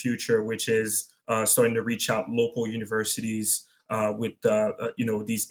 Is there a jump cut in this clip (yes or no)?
no